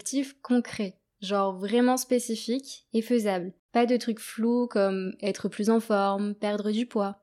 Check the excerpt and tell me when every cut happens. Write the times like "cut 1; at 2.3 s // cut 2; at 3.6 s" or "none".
cut 1; at 3.6 s

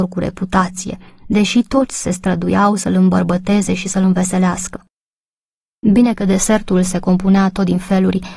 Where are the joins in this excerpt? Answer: none

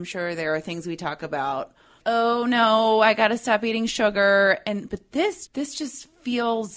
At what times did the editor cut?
cut 1; at 2.0 s // cut 2; at 5.5 s

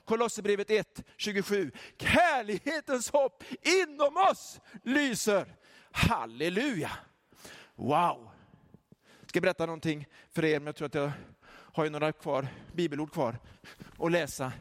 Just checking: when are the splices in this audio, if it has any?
none

